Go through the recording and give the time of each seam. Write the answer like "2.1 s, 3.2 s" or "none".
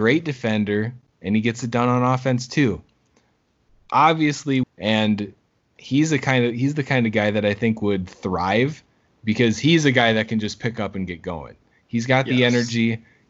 4.6 s